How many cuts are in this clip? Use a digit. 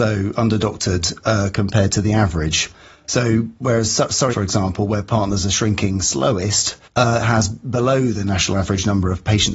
2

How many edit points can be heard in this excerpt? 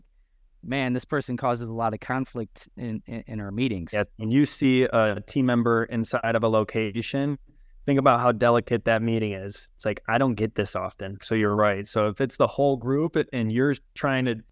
1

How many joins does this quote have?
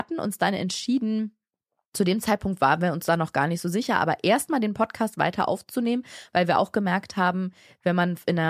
0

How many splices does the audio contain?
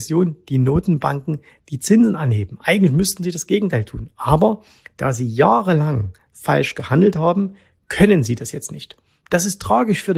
0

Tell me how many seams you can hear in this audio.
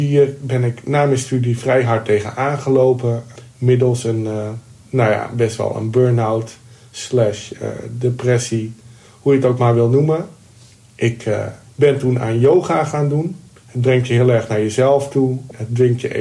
0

